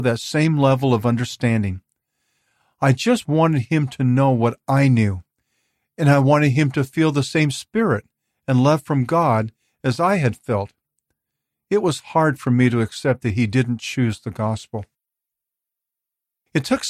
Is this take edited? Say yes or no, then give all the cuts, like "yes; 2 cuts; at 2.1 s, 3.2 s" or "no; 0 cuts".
no; 0 cuts